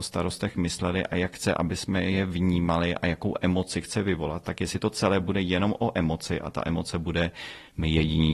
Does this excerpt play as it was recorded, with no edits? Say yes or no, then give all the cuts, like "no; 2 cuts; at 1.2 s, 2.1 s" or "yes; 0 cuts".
yes; 0 cuts